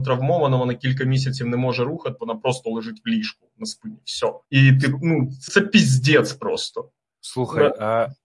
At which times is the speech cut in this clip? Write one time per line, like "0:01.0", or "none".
0:02.2
0:04.4
0:05.5